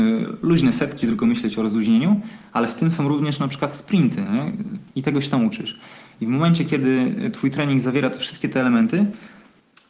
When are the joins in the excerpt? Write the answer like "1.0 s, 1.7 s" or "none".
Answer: 1.0 s, 4.9 s